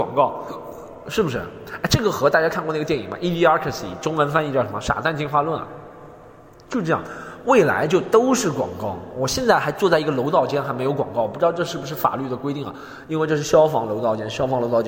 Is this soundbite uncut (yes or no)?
yes